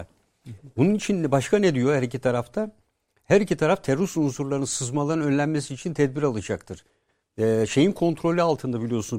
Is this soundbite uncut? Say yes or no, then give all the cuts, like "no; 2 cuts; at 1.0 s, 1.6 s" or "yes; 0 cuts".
yes; 0 cuts